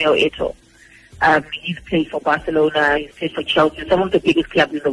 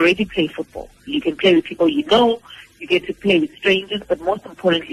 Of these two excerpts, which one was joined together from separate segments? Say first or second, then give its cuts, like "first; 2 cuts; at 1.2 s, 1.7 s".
second; 1 cut; at 1.1 s